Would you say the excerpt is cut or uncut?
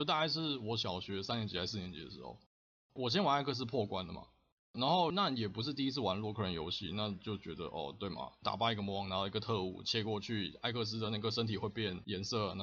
uncut